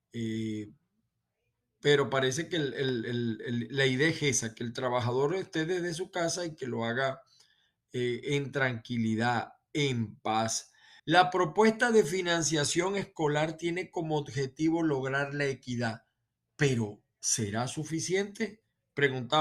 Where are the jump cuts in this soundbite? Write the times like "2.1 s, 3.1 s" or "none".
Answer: 11.0 s